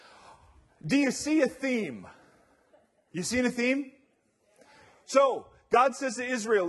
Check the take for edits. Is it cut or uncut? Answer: uncut